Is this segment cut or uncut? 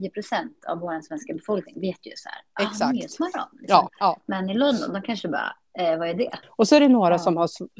cut